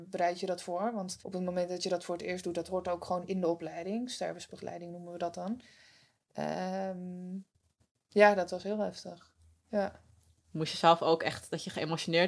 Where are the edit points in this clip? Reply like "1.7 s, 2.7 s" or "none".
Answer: 1.2 s